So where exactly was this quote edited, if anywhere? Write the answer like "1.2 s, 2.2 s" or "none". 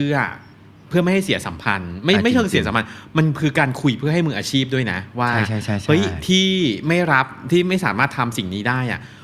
none